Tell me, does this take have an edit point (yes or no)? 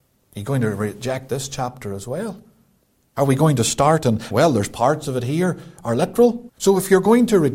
yes